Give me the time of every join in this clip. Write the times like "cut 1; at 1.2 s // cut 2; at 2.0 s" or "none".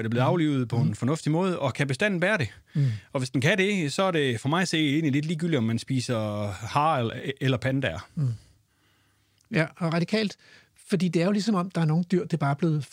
none